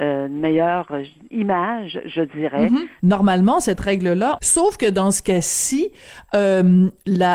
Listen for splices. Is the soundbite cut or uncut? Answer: cut